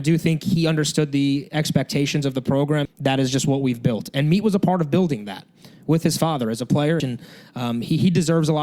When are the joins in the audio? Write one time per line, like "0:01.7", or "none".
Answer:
0:02.9
0:07.0